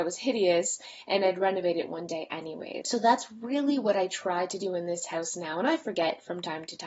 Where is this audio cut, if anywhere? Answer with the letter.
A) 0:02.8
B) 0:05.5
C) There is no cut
A